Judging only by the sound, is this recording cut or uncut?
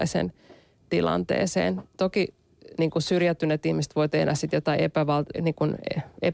cut